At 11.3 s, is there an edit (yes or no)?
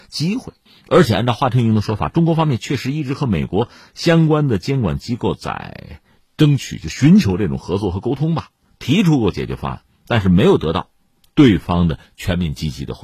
no